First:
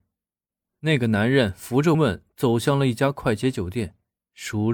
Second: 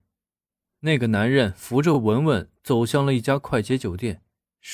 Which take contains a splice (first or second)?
first